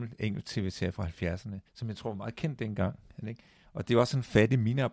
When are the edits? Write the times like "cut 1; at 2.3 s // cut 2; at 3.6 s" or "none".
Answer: cut 1; at 1.7 s // cut 2; at 3.2 s